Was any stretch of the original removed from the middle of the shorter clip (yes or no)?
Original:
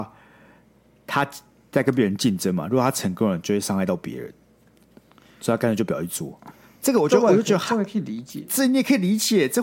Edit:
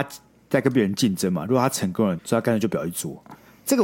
yes